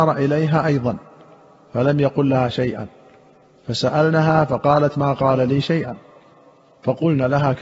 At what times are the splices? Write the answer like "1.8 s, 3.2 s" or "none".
none